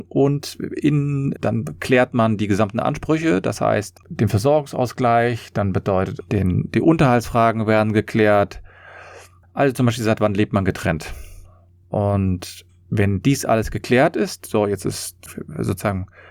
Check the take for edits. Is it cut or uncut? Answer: cut